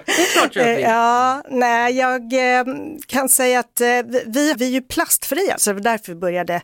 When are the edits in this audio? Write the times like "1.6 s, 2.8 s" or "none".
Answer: 4.5 s, 5.6 s